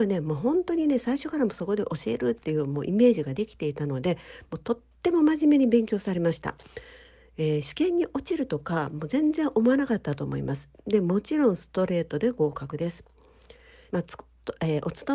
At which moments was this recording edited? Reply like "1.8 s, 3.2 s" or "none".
13.9 s